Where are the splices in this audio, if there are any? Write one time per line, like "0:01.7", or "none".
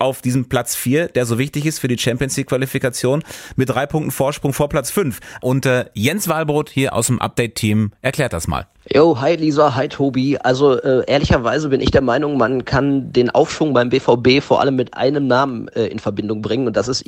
0:05.4